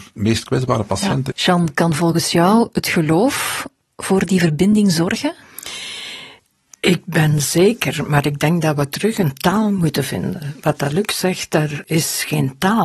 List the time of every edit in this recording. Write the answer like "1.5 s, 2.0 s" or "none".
1.3 s, 11.8 s